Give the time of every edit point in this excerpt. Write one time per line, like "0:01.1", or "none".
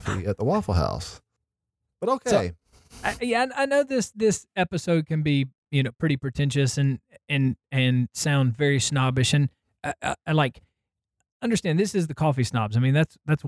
none

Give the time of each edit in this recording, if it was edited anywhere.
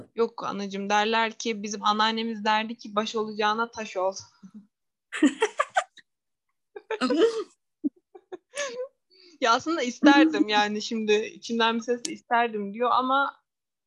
none

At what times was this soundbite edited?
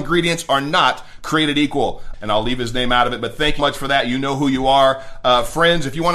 0:02.1
0:03.6

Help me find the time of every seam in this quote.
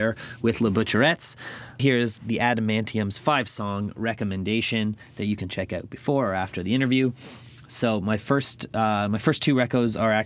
none

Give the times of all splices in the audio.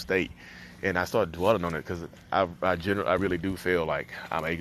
0:03.2

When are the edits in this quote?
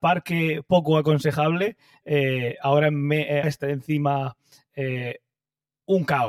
0:03.4

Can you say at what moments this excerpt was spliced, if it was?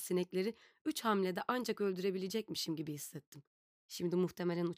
0:03.7

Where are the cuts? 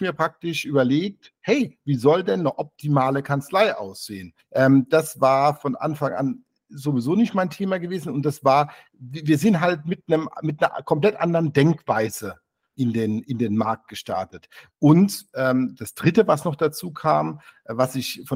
0:04.4
0:12.7
0:14.7

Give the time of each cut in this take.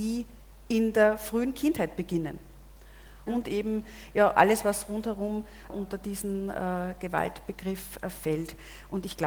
0:03.3
0:05.7

